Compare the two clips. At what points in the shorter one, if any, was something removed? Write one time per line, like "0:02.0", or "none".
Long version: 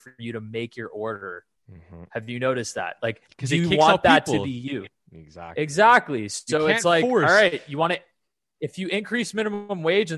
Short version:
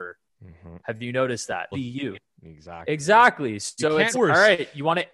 0:01.7
0:04.1

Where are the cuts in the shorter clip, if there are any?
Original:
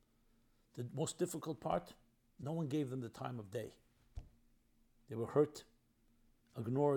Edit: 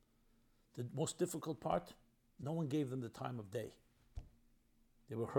none

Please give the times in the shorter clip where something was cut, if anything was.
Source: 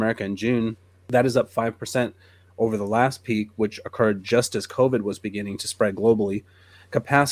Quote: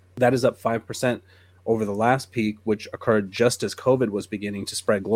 none

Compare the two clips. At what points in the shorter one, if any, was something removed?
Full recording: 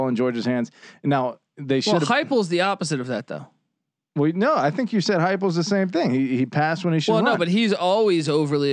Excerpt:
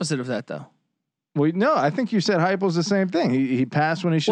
none

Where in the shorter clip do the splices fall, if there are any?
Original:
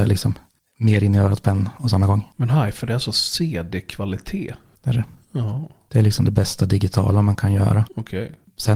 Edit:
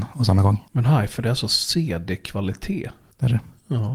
none

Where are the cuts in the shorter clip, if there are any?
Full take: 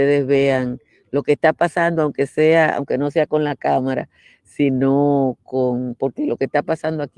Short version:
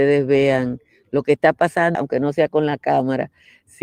0:01.9

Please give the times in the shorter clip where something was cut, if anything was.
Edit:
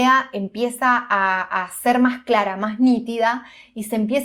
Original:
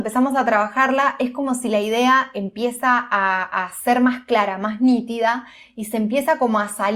none

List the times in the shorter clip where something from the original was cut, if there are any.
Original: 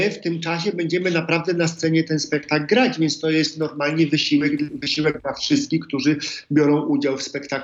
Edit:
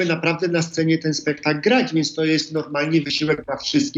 0:03.0

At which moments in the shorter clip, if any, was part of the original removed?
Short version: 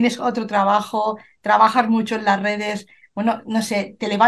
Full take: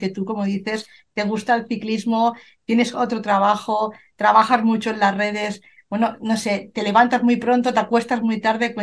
none

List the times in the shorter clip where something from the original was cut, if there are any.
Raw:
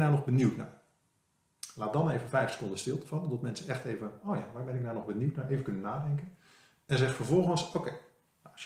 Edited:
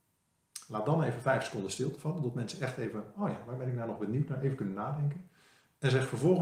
none

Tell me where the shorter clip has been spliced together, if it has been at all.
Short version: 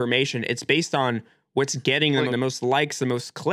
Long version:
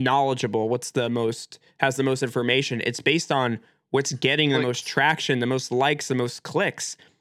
0:02.3

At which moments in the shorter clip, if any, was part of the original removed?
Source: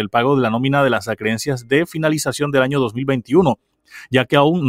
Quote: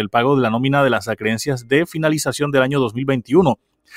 none

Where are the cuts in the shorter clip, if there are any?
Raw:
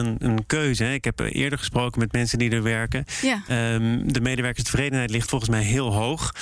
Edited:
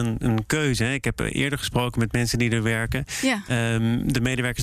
none

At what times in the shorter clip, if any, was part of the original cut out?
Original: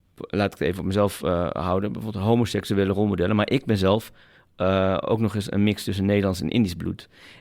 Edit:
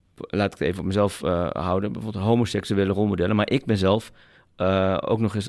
none

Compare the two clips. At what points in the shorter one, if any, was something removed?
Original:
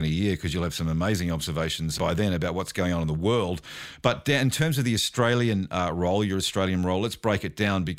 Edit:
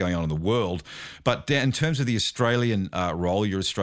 none

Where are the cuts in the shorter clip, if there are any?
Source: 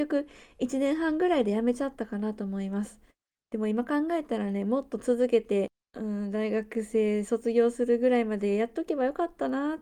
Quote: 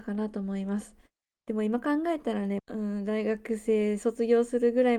0:02.6

